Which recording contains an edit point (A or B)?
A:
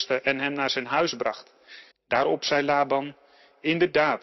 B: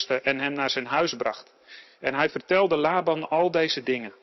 A